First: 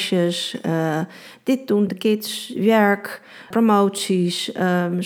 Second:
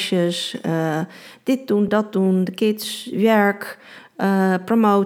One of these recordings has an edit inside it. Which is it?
first; 2 cuts; at 1.9 s, 3.5 s

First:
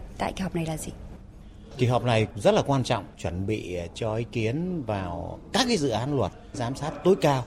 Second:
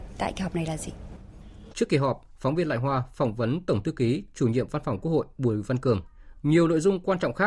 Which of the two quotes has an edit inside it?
second; 2 cuts; at 1.7 s, 6.4 s

